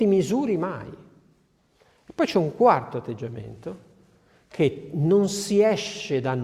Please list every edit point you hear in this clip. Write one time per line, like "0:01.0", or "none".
none